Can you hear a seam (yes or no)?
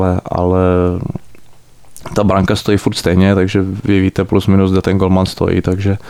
no